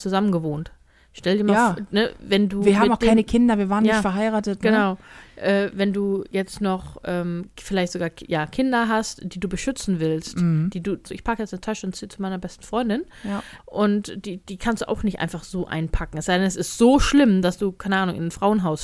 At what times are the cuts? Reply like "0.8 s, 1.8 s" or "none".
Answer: 11.0 s, 13.6 s

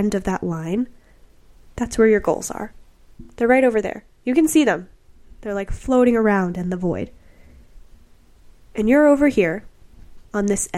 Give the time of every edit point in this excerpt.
none

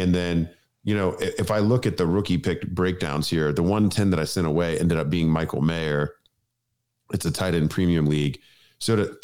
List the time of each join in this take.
none

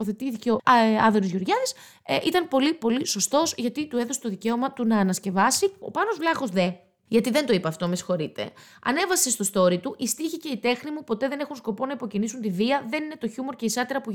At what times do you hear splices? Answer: none

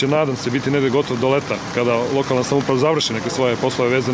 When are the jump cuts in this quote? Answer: none

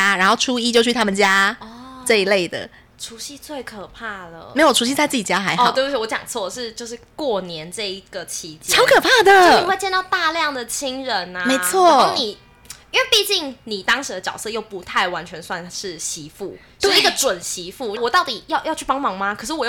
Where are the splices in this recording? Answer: 18.0 s

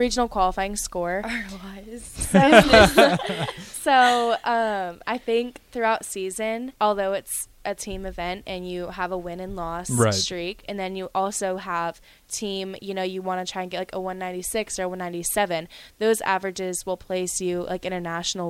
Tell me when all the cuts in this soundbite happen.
6.8 s

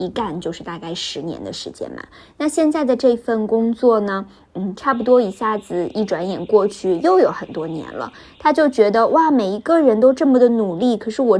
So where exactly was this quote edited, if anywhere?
none

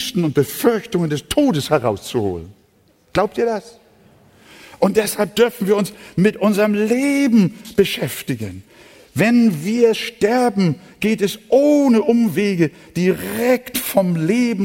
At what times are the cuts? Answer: none

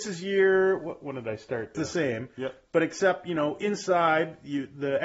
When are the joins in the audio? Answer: 1.7 s

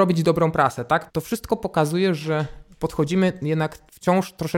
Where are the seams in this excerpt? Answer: 1.1 s

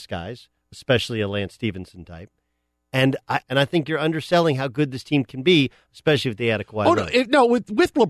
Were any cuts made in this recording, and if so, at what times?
3.4 s

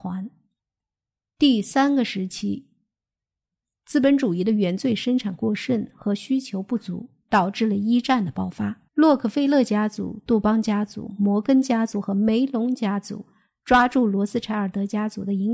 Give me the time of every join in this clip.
1.2 s, 8.9 s

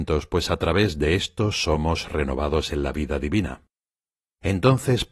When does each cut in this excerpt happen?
none

